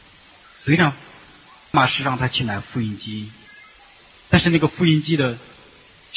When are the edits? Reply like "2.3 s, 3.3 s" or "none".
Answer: 1.7 s